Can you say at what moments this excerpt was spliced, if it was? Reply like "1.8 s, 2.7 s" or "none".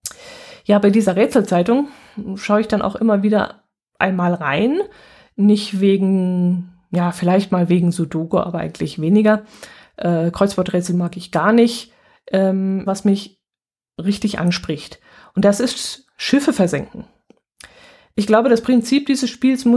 12.9 s